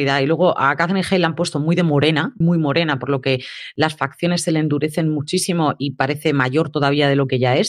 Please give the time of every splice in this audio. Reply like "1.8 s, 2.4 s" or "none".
2.4 s

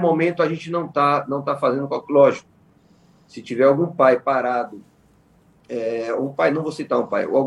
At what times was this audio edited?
none

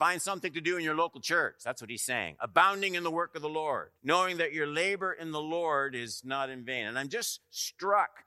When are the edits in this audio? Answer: 4.0 s

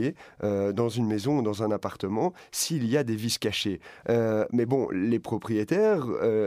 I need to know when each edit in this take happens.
4.0 s

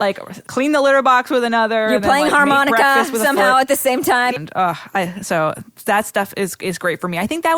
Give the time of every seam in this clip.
4.4 s

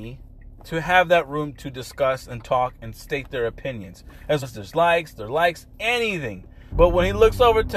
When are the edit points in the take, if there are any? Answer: 4.4 s, 6.7 s

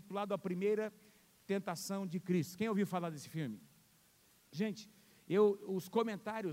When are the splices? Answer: none

